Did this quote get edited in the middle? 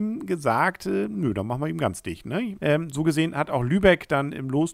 yes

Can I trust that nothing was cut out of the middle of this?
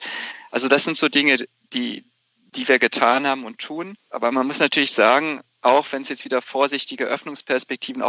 no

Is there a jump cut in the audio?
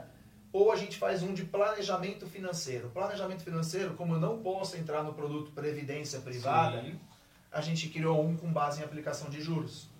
no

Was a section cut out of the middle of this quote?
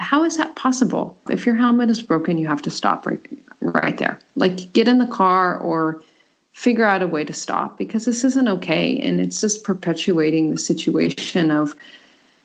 yes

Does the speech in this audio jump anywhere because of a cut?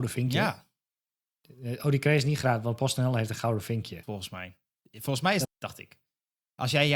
yes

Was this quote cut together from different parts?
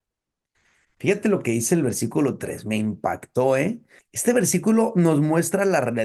yes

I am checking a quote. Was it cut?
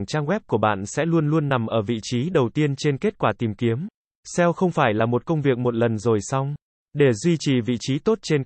yes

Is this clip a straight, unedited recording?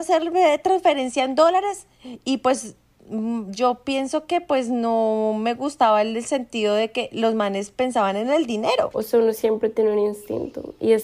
no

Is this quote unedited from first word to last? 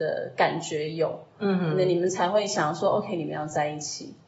yes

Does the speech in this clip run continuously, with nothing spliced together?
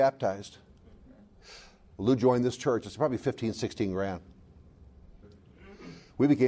no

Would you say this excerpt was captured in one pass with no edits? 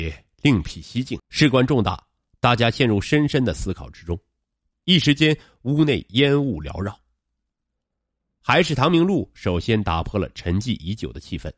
no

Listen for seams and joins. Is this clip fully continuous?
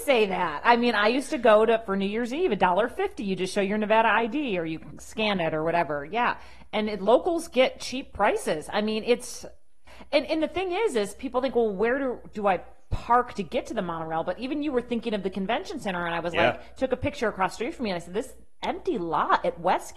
yes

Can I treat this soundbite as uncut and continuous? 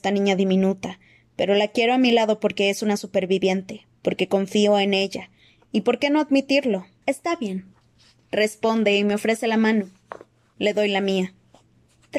no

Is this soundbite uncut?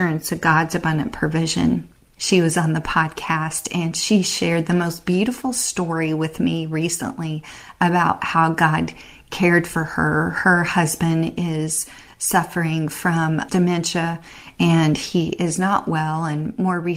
no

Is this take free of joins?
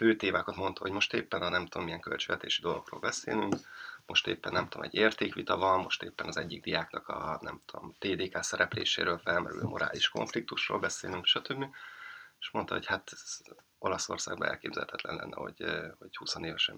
no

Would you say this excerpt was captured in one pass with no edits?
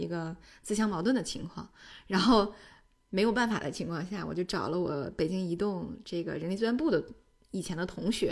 yes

